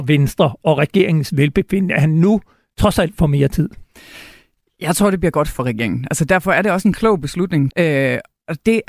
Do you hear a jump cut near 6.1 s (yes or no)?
no